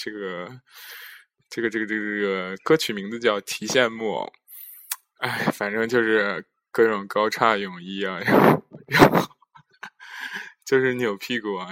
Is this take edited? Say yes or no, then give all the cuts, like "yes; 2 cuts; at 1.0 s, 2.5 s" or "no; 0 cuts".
no; 0 cuts